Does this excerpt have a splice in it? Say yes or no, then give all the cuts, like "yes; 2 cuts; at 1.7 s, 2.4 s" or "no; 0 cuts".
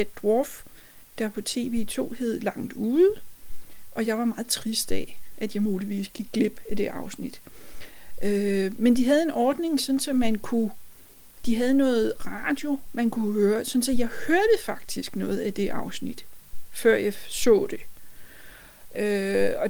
no; 0 cuts